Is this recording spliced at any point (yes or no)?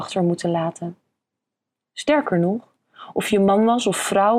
no